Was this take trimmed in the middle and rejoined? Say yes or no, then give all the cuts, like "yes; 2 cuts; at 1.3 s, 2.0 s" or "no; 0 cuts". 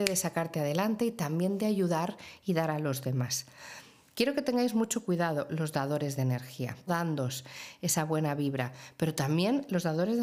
yes; 1 cut; at 6.9 s